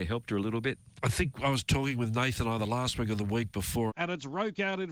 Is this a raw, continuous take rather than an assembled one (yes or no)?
no